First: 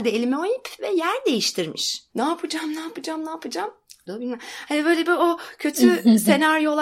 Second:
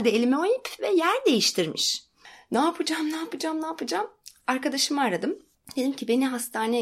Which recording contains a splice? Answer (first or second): first